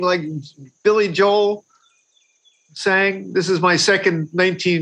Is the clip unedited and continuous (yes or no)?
yes